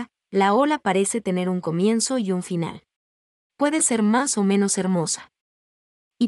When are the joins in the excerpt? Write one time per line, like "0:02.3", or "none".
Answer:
0:03.4